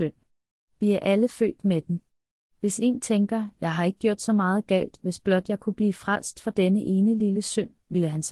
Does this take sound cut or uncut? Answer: uncut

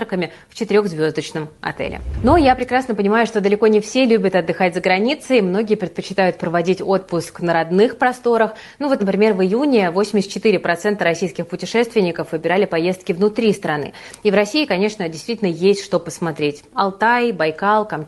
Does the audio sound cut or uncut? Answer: uncut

